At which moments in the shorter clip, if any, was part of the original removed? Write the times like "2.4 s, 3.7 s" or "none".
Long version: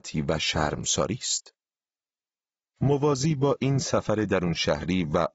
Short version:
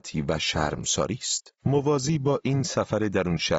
1.6 s